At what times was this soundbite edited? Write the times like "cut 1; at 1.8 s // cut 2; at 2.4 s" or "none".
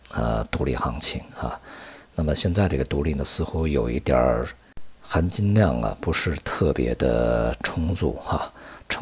none